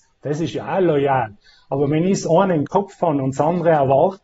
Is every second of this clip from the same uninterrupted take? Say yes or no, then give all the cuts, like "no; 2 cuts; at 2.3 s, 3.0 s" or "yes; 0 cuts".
yes; 0 cuts